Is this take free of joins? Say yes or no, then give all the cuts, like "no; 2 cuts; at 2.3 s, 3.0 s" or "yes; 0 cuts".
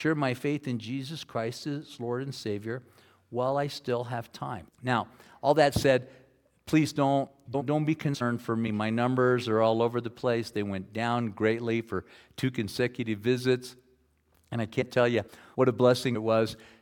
no; 1 cut; at 4.7 s